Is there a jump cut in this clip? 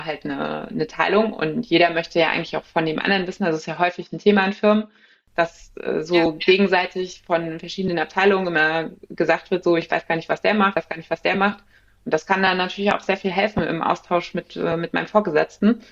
yes; 1 cut; at 12.0 s

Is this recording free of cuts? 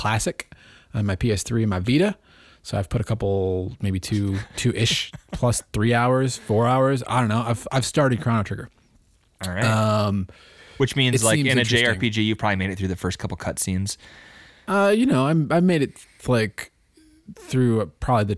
yes; 0 cuts

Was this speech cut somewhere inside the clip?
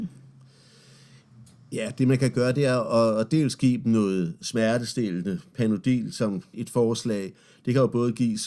no; 0 cuts

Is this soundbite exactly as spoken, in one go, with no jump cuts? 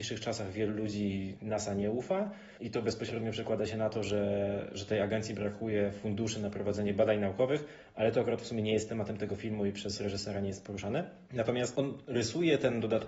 yes; 0 cuts

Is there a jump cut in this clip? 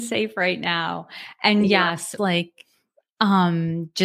yes; 1 cut; at 2.2 s

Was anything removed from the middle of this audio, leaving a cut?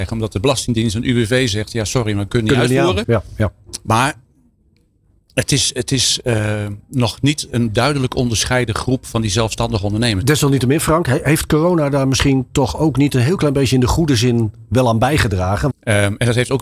yes; 3 cuts; at 3.0 s, 10.2 s, 15.7 s

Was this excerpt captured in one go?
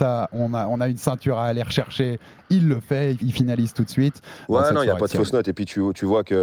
no; 2 cuts; at 3.2 s, 4.5 s

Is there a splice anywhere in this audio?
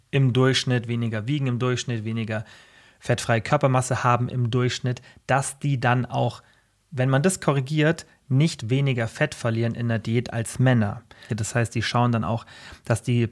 yes; 2 cuts; at 8.6 s, 11.3 s

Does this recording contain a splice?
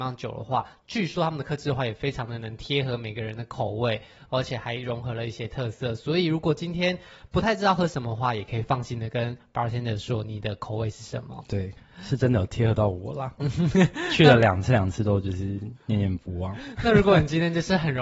no; 0 cuts

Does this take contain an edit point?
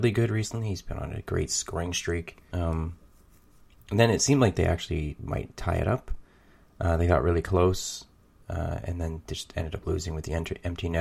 yes; 1 cut; at 2.5 s

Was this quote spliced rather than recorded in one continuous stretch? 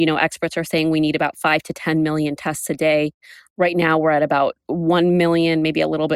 no; 0 cuts

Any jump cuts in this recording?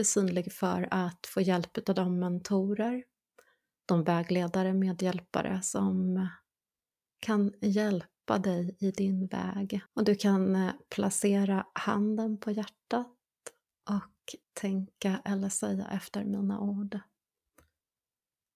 yes; 2 cuts; at 9.9 s, 14.4 s

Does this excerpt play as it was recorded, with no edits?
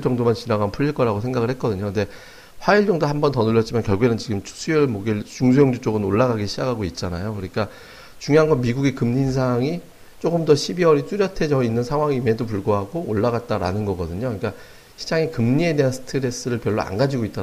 yes; 0 cuts

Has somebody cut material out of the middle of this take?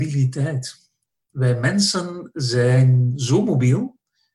no; 0 cuts

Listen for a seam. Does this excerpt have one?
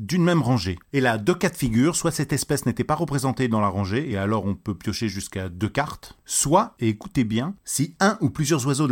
no; 0 cuts

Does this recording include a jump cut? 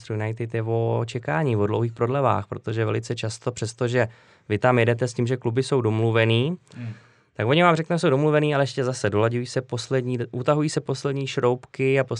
no; 0 cuts

